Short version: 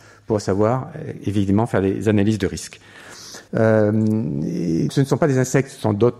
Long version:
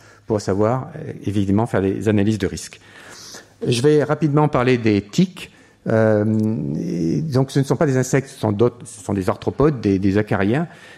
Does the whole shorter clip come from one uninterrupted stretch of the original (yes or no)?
no